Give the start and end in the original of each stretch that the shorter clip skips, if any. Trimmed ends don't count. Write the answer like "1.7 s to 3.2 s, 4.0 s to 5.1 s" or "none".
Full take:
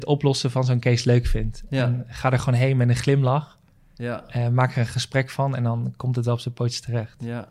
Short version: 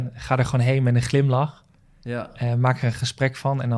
none